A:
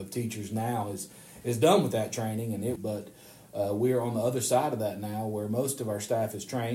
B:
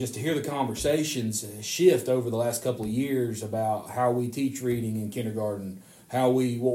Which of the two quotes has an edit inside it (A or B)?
A